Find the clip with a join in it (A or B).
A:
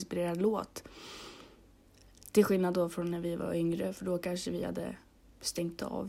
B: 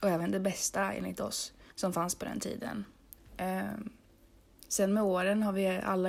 B